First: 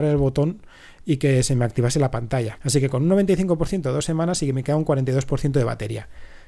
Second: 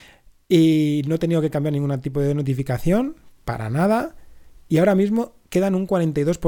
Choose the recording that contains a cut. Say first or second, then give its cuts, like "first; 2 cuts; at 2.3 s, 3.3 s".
first; 1 cut; at 2.6 s